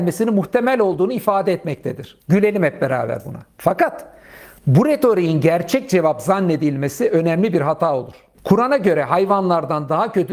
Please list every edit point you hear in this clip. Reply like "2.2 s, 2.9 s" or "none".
2.2 s, 8.3 s